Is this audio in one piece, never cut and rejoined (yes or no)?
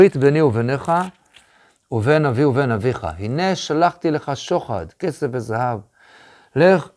yes